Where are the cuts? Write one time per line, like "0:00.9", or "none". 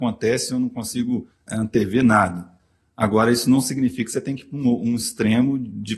none